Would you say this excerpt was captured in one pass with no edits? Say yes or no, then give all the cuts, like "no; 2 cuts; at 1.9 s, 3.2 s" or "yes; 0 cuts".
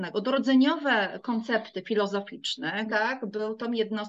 no; 1 cut; at 2.9 s